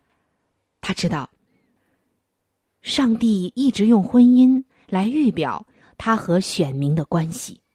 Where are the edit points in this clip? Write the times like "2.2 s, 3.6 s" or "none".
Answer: none